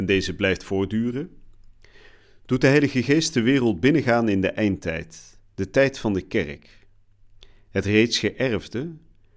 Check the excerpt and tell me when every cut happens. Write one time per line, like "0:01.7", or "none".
none